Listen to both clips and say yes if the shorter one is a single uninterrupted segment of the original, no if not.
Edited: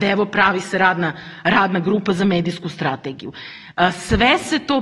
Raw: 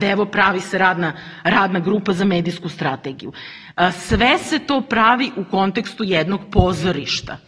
yes